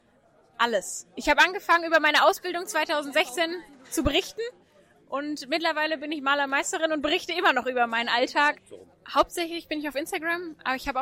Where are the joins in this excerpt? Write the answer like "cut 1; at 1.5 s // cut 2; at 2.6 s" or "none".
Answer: cut 1; at 8.5 s